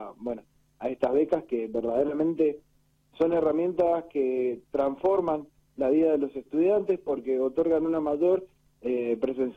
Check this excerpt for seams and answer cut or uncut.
uncut